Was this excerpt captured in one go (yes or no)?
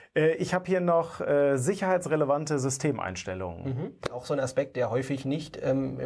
yes